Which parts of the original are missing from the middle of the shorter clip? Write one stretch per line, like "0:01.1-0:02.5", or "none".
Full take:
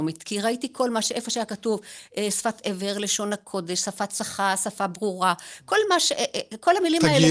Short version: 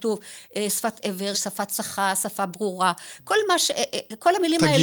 0:02.9-0:03.7